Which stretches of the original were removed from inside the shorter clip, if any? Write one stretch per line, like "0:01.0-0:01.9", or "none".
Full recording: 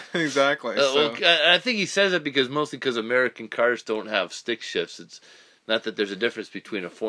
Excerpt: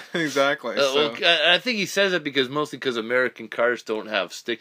none